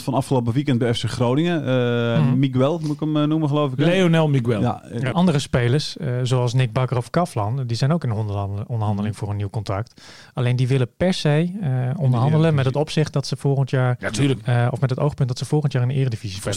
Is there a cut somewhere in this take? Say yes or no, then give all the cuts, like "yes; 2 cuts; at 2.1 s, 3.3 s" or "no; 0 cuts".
yes; 1 cut; at 5.1 s